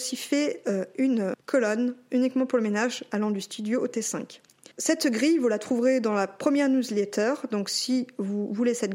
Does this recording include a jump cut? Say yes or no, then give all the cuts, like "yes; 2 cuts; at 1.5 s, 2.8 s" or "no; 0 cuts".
no; 0 cuts